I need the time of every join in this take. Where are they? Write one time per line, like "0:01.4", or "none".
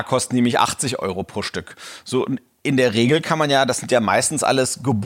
none